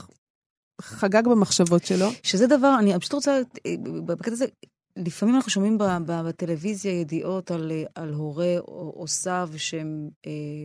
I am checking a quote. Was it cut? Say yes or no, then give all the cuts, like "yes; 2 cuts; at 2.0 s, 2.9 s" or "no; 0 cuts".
no; 0 cuts